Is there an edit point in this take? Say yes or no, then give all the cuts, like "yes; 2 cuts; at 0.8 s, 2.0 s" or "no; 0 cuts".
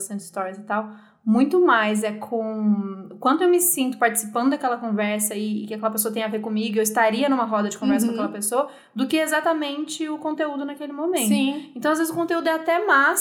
no; 0 cuts